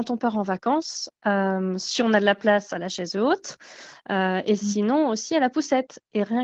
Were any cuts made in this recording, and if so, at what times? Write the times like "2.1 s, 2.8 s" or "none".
1.1 s